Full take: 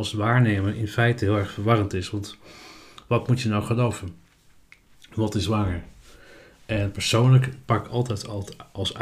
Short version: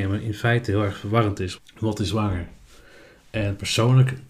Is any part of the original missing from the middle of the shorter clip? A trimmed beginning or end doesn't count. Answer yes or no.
yes